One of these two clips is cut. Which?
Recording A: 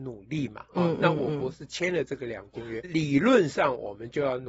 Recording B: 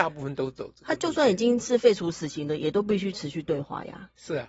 A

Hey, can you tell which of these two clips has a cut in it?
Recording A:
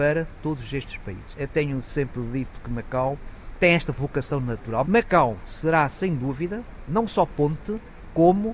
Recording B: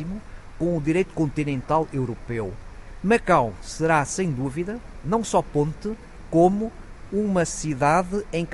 A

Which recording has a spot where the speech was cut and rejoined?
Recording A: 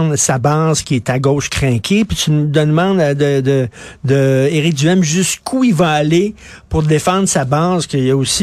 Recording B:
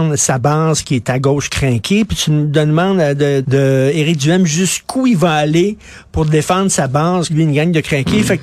B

